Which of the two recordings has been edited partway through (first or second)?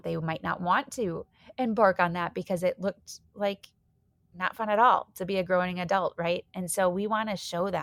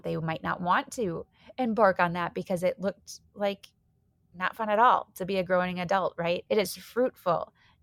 second